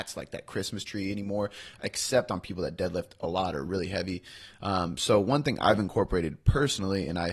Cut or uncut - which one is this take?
uncut